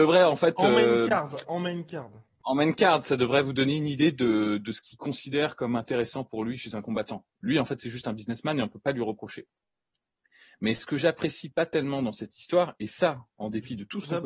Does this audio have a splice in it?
no; 0 cuts

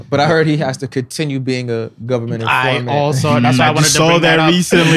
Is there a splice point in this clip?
no; 0 cuts

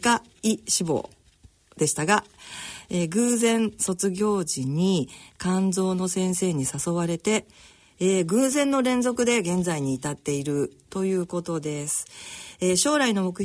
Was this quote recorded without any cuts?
yes; 0 cuts

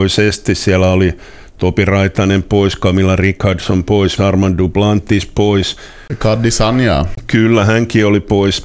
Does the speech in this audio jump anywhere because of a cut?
yes; 1 cut; at 4.2 s

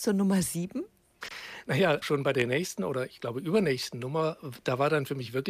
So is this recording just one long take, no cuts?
no; 1 cut; at 2.0 s

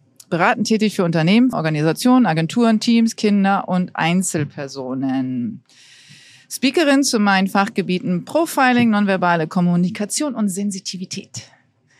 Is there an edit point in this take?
yes; 1 cut; at 1.5 s

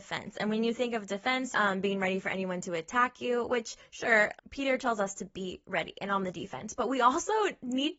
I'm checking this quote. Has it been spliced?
yes; 2 cuts; at 1.5 s, 4.4 s

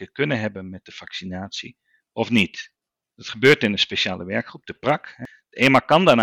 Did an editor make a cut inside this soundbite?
no; 0 cuts

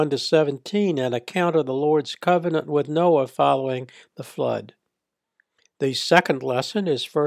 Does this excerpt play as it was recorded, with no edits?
yes; 0 cuts

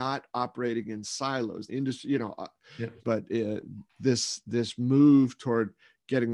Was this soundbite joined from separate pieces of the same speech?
yes; 2 cuts; at 1.7 s, 3.0 s

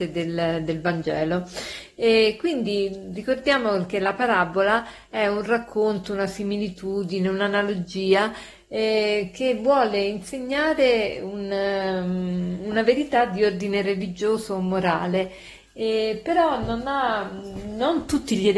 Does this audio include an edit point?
no; 0 cuts

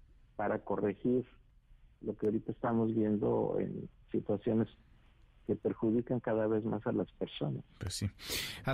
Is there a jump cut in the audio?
no; 0 cuts

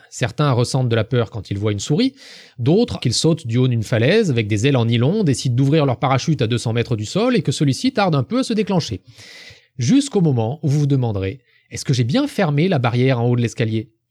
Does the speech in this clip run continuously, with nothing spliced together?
no; 2 cuts; at 3.0 s, 9.6 s

